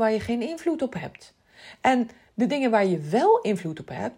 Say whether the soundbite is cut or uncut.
uncut